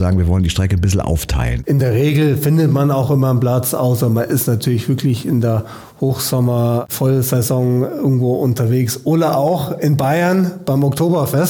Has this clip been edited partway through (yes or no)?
yes